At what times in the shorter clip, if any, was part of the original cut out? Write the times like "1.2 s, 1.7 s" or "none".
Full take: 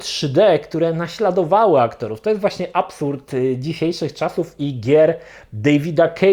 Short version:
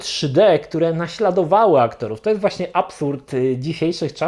none